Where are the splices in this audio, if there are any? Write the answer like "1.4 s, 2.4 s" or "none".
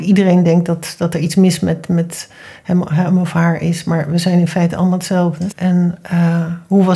5.5 s